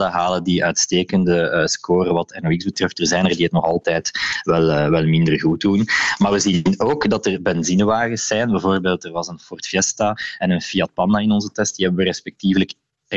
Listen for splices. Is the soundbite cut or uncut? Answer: uncut